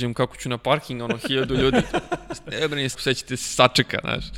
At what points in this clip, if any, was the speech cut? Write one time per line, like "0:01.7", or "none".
0:02.9